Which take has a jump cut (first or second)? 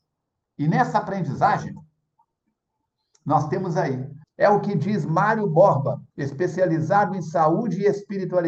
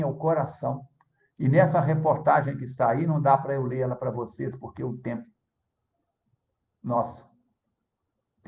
first